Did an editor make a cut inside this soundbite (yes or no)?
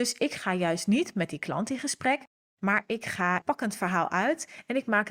yes